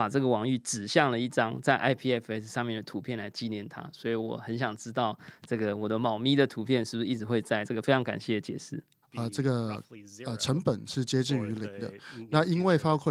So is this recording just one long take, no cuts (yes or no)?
no